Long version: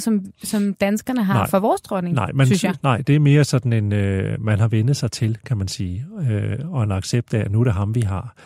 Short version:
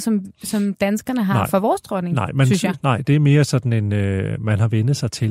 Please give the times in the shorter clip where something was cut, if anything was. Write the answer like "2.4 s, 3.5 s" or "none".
none

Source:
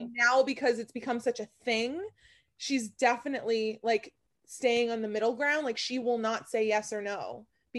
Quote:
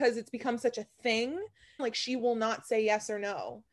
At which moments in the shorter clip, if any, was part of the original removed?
1.8 s

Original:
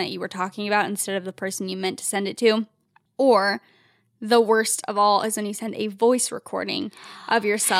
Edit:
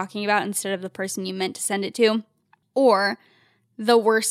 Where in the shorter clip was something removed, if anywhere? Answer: none

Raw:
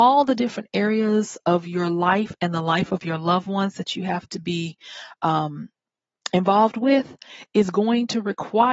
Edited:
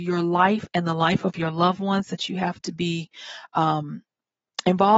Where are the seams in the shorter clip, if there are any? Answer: none

